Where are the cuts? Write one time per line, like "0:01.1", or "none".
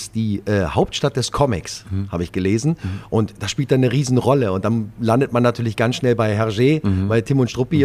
none